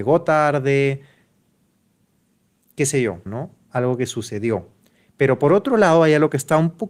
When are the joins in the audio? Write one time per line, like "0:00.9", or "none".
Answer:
0:03.3